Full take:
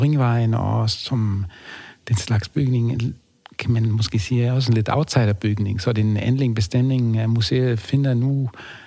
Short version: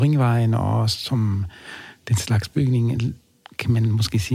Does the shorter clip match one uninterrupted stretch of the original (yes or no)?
yes